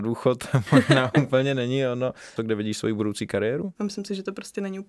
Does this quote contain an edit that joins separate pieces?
yes; 2 cuts; at 2.4 s, 3.7 s

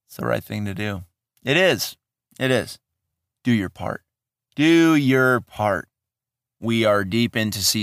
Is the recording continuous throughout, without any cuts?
no; 1 cut; at 6.6 s

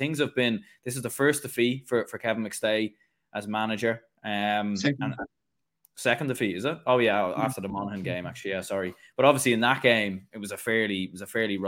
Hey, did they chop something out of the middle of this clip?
no; 0 cuts

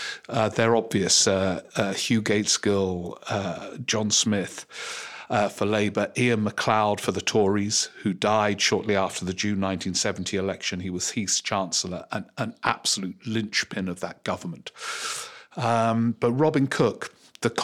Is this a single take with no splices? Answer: yes; 0 cuts

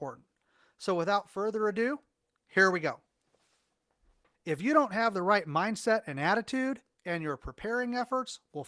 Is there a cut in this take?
yes; 2 cuts; at 4.3 s, 7.0 s

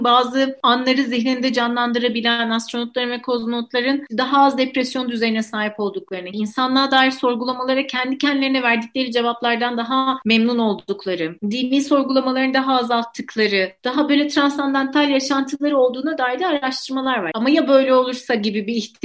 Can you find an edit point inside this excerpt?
yes; 2 cuts; at 6.3 s, 17.3 s

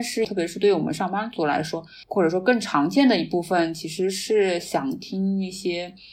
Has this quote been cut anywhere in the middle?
no; 0 cuts

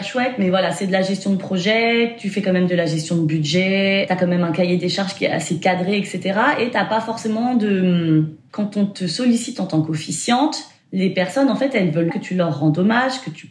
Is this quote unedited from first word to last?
no; 2 cuts; at 8.5 s, 12.1 s

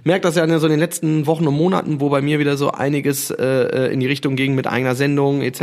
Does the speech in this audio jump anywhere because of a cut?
no; 0 cuts

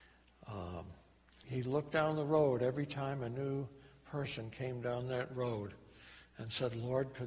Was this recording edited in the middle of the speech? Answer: yes; 1 cut; at 1.4 s

